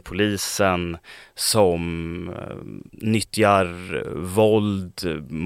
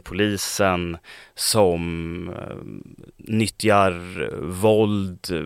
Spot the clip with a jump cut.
first; 1 cut; at 2.9 s

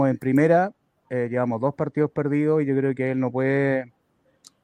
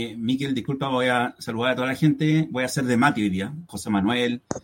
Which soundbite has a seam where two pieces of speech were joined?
second; 1 cut; at 3.7 s

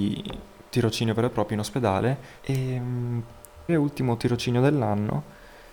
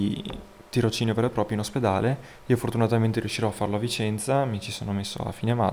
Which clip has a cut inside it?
first; 2 cuts; at 2.4 s, 3.7 s

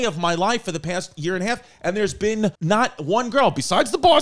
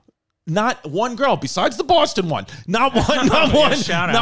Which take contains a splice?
first; 1 cut; at 2.5 s

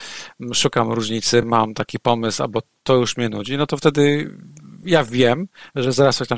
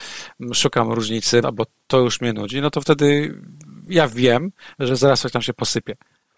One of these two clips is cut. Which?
second; 1 cut; at 1.4 s

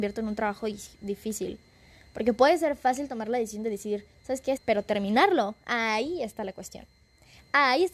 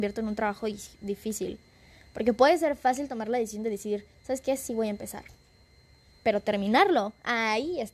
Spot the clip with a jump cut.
first; 1 cut; at 4.6 s

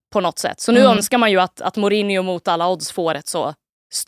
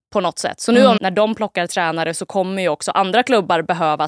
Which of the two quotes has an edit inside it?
second; 1 cut; at 1.0 s

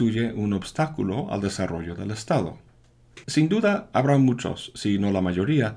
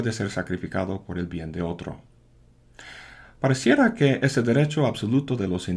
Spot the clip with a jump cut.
first; 1 cut; at 3.2 s

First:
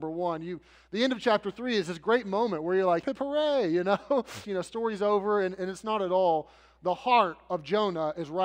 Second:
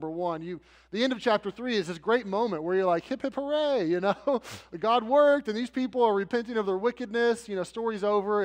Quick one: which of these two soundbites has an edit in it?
first; 2 cuts; at 3.0 s, 4.4 s

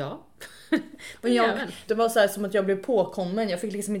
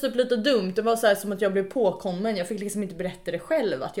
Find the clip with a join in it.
first; 1 cut; at 1.9 s

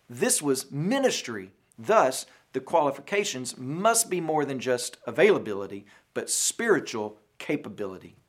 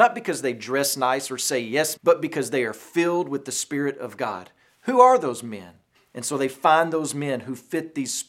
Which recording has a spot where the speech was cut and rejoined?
second; 2 cuts; at 2.0 s, 5.9 s

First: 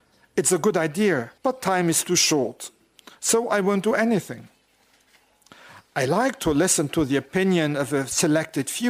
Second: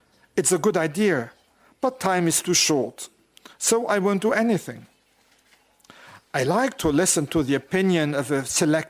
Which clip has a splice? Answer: first; 1 cut; at 1.4 s

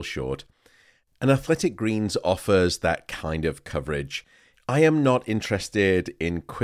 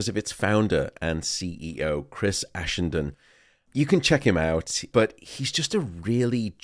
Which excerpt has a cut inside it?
first; 1 cut; at 4.5 s

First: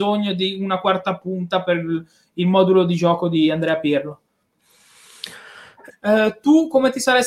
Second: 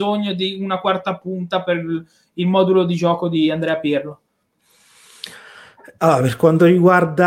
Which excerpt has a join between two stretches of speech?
first; 1 cut; at 5.9 s

